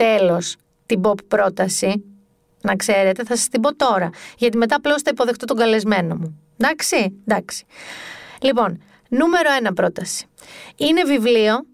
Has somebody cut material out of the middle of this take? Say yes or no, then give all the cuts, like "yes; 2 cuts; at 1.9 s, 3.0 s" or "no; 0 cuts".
no; 0 cuts